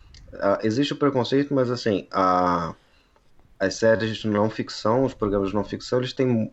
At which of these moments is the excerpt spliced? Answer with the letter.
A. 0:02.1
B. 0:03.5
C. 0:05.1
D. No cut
D